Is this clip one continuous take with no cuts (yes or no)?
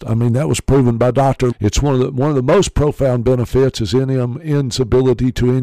no